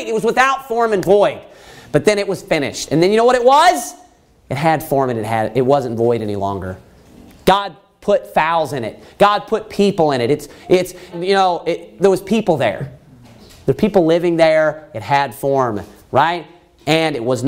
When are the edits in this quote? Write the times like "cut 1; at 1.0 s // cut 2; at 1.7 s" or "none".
cut 1; at 11.1 s